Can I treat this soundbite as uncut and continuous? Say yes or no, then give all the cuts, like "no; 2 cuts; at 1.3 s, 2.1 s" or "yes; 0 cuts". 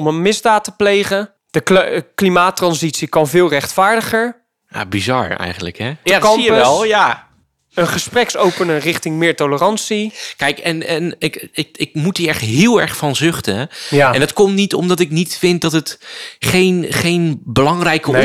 no; 1 cut; at 6.0 s